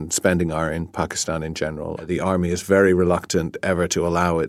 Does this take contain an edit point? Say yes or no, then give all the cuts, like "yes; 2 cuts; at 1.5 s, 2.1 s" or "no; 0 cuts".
yes; 1 cut; at 2.0 s